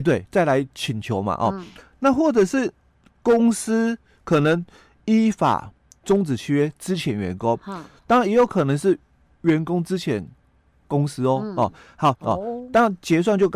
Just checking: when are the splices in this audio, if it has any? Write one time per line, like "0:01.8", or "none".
0:12.1